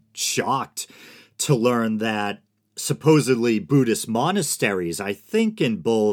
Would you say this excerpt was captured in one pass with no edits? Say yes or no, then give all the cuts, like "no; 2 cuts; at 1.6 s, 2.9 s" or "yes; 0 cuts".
yes; 0 cuts